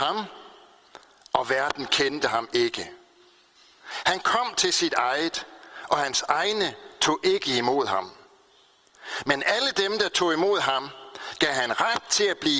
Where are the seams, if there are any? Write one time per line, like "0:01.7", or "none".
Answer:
none